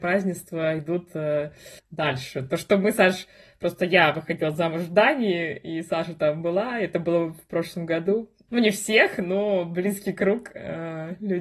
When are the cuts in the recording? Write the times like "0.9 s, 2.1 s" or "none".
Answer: 1.8 s, 8.5 s